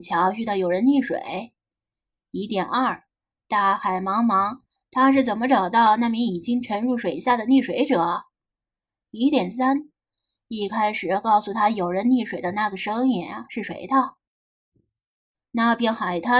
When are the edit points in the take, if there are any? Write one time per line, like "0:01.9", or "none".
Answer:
0:15.3